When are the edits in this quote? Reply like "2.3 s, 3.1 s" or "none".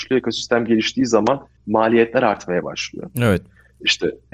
3.1 s